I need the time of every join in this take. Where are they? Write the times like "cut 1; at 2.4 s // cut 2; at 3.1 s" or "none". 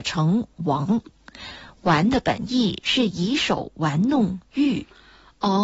none